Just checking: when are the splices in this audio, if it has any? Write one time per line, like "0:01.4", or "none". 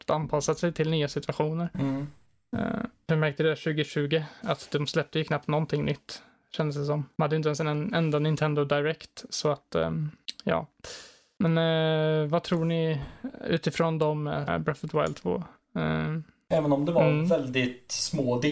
0:14.5
0:16.5